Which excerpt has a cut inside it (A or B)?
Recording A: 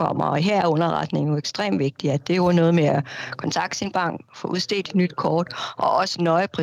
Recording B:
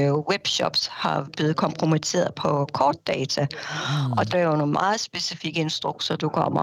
B